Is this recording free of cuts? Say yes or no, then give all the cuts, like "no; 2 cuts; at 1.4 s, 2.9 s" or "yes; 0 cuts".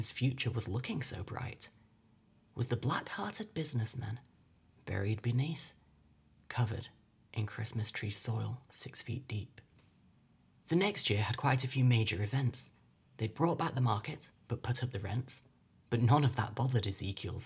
yes; 0 cuts